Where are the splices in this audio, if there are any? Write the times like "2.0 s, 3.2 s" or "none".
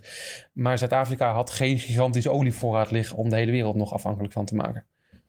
none